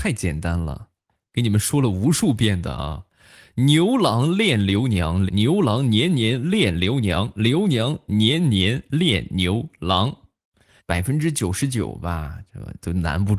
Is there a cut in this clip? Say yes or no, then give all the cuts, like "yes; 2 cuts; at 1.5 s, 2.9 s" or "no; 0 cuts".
yes; 2 cuts; at 5.3 s, 10.8 s